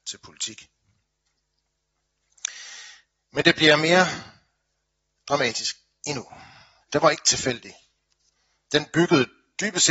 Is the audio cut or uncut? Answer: cut